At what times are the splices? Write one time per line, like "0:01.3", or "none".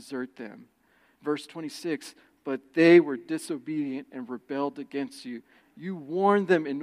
0:05.6